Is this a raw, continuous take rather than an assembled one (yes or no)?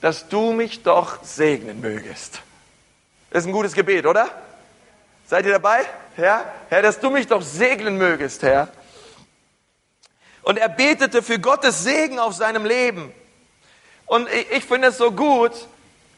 no